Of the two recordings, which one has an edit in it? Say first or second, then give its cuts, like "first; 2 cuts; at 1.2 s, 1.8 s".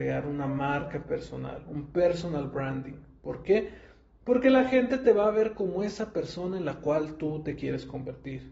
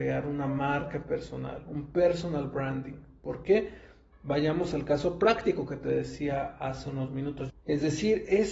second; 2 cuts; at 4.1 s, 7.5 s